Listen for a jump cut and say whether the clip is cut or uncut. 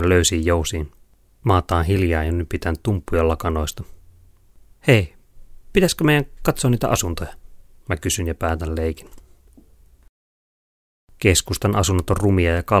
uncut